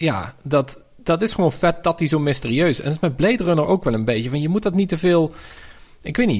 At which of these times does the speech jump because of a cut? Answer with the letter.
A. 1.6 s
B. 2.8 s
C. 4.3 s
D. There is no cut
D